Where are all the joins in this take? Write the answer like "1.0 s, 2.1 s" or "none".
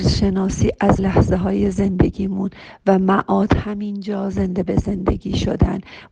1.0 s